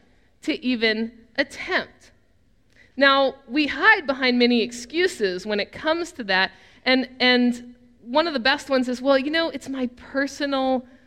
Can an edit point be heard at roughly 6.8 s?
no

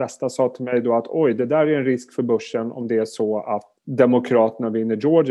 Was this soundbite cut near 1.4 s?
no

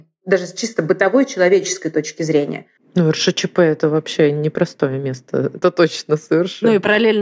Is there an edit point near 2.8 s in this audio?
yes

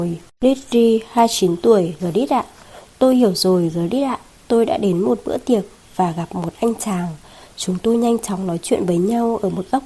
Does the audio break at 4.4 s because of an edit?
no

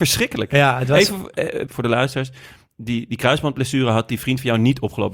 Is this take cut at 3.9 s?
no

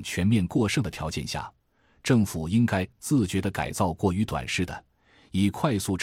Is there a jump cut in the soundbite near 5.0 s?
no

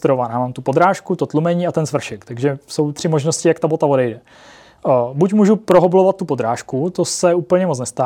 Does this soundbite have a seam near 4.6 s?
no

